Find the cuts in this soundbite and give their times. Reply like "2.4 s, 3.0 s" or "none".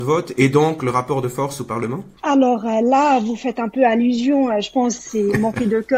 2.2 s, 5.0 s